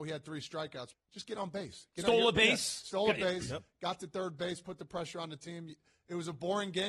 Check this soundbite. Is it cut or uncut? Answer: cut